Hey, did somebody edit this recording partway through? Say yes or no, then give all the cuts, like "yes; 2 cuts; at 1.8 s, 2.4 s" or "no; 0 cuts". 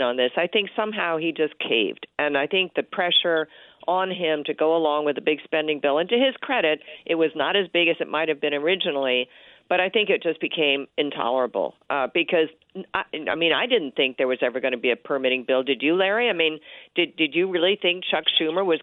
no; 0 cuts